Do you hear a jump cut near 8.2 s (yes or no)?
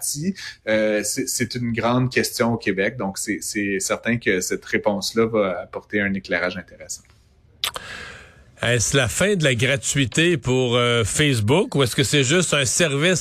no